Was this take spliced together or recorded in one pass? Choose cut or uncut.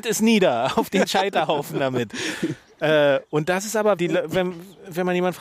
cut